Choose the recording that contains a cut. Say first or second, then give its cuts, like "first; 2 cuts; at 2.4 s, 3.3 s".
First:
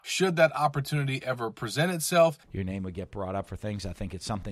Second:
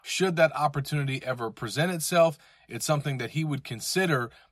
first; 1 cut; at 2.4 s